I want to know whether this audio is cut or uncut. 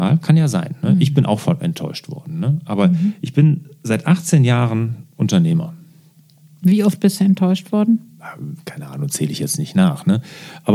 uncut